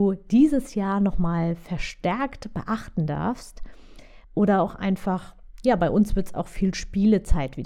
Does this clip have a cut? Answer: yes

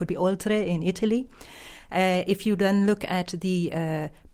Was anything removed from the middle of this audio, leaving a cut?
no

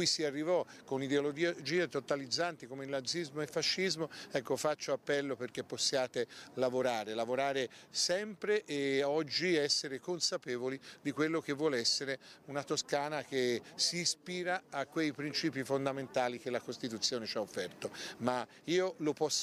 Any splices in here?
no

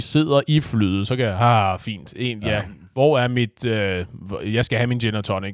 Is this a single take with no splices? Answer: yes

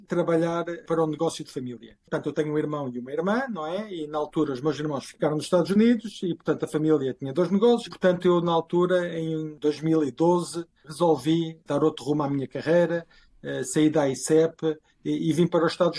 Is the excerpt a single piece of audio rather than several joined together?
no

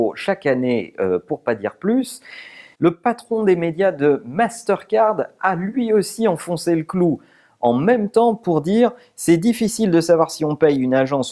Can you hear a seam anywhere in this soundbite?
yes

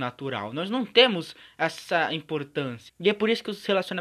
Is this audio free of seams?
no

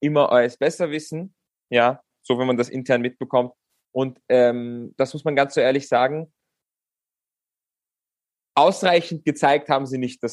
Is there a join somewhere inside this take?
no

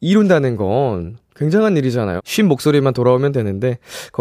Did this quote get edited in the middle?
yes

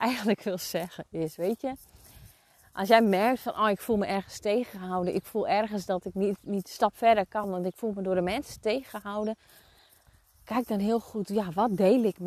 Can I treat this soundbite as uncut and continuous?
yes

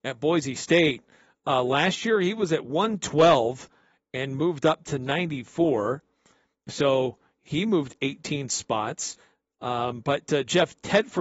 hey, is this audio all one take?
yes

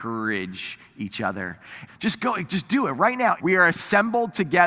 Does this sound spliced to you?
yes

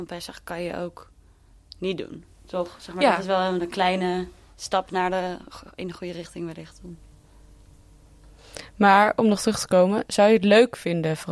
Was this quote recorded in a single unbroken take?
yes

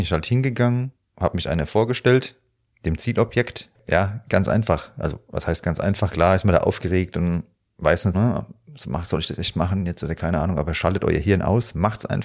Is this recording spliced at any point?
yes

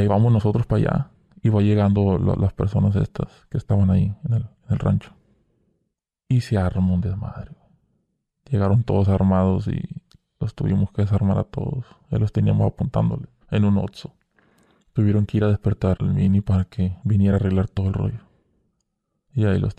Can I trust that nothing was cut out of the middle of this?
no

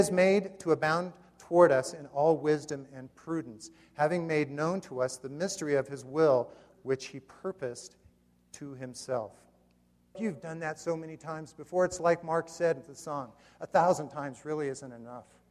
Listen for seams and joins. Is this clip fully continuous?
no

